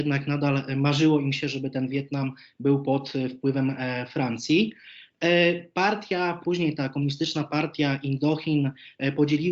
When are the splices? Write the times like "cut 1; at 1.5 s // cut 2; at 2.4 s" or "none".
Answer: cut 1; at 6.4 s